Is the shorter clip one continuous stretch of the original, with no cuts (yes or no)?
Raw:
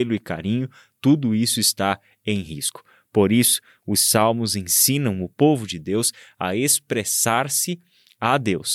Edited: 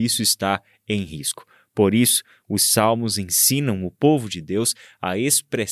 yes